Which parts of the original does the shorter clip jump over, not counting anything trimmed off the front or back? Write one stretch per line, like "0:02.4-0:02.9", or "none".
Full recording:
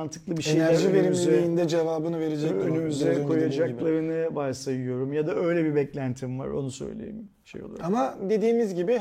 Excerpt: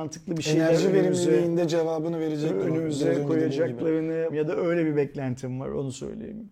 0:04.3-0:05.1